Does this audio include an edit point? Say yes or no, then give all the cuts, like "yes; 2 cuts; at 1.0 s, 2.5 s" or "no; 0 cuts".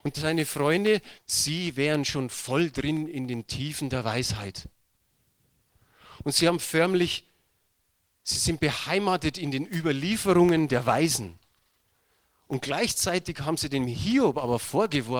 yes; 1 cut; at 1.2 s